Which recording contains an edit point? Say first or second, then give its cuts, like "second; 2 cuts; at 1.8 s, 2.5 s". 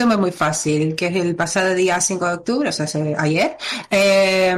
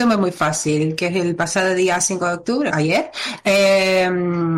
second; 1 cut; at 2.7 s